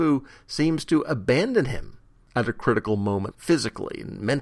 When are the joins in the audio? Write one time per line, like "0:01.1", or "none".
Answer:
0:03.3